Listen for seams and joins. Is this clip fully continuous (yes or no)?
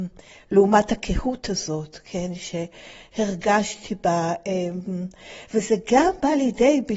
yes